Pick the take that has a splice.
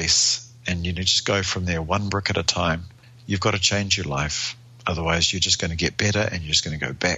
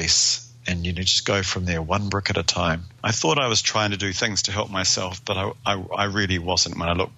second; 1 cut; at 3.0 s

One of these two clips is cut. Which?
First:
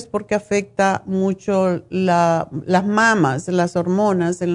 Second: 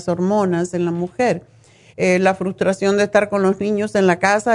second; 1 cut; at 1.9 s

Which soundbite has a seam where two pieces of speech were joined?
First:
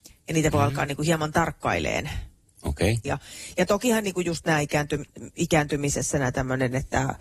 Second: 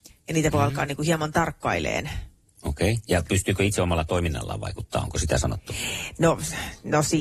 first; 1 cut; at 3.0 s

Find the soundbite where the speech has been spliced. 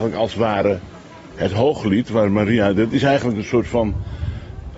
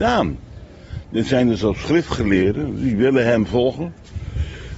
second; 1 cut; at 1.0 s

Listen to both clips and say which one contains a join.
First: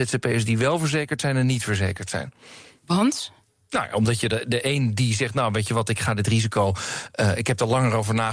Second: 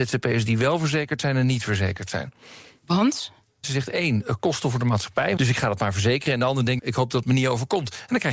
second; 3 cuts; at 3.6 s, 5.4 s, 6.8 s

